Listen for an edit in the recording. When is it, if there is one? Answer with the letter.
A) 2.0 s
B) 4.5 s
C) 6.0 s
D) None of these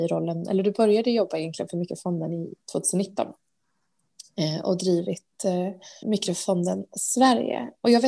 C